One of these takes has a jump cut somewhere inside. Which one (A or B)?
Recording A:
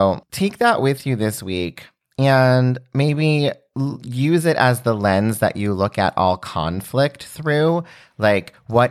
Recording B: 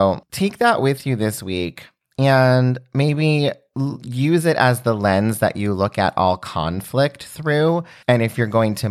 B